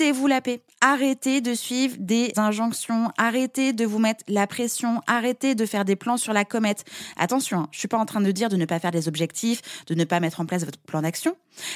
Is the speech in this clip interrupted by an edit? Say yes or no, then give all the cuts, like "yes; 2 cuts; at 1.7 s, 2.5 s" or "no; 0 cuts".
yes; 1 cut; at 2.3 s